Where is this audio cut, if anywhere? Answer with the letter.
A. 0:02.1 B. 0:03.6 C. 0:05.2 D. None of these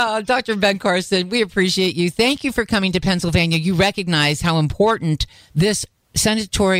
D